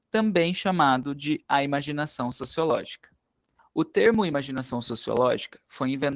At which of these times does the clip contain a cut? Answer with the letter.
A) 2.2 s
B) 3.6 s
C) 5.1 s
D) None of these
B